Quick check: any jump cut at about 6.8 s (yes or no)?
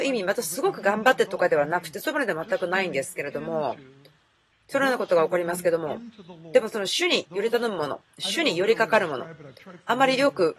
no